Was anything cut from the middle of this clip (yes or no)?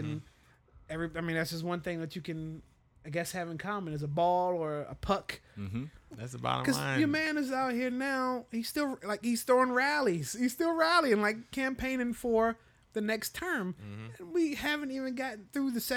yes